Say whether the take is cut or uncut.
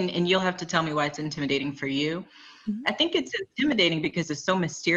uncut